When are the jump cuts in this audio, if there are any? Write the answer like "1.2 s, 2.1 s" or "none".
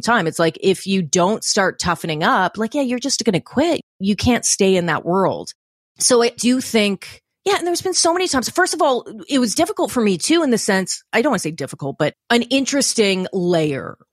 none